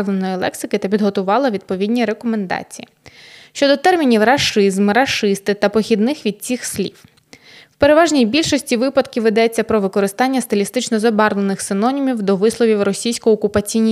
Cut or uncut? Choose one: uncut